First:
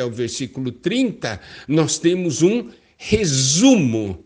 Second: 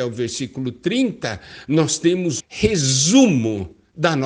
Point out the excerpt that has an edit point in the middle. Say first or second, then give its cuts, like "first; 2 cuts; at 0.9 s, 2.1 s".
second; 1 cut; at 2.4 s